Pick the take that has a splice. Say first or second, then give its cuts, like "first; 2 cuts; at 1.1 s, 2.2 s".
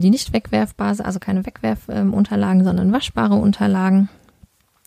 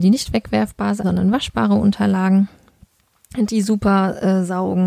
second; 1 cut; at 1.0 s